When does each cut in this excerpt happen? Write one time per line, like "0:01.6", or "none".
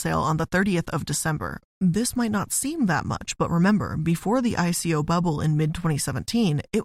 0:01.6